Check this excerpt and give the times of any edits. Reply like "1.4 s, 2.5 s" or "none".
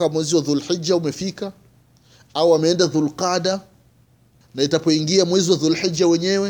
4.4 s